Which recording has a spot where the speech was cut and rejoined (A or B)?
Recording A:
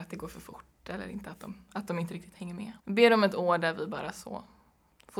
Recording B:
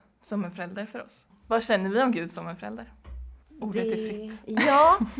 A